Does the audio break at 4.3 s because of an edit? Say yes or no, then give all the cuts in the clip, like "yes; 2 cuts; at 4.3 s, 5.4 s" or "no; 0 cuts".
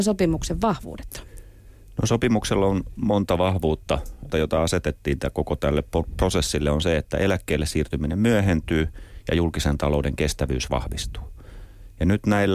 yes; 1 cut; at 4.3 s